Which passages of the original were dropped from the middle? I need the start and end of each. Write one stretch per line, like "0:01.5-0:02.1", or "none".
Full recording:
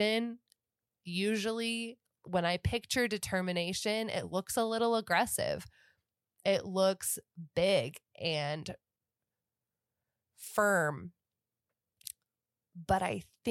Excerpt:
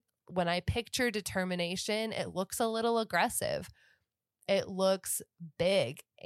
none